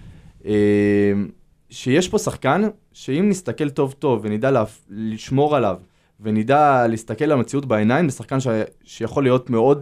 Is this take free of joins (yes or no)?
yes